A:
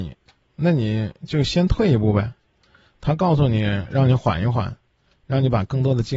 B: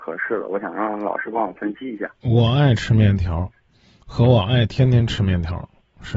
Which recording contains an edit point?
B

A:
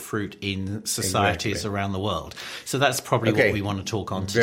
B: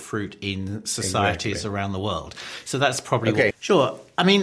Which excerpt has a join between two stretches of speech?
B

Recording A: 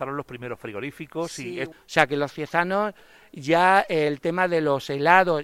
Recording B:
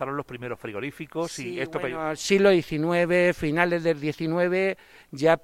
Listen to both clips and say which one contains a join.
A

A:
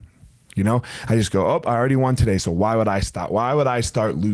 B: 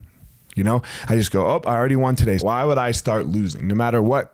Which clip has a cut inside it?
B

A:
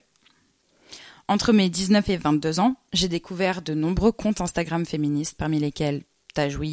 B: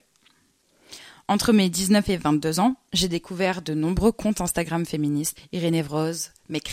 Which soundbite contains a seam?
B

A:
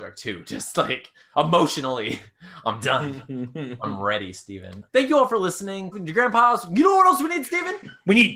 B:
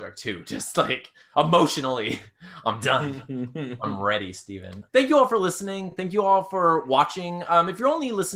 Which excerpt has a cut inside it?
A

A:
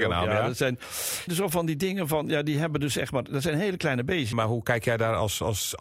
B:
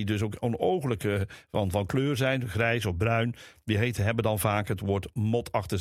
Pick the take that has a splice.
A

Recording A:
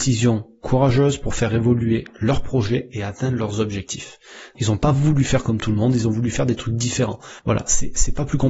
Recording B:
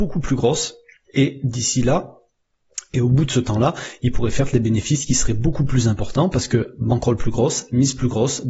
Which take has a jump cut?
A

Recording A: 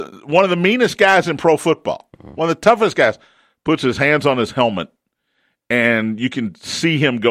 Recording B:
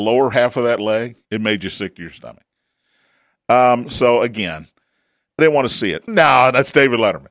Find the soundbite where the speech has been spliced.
B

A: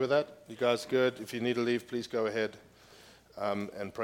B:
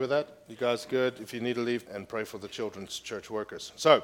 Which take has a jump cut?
B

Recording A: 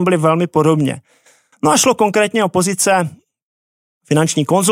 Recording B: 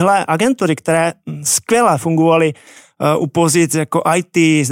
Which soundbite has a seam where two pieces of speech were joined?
A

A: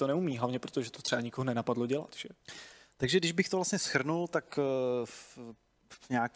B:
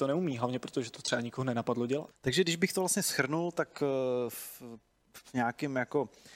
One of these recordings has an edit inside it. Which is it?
B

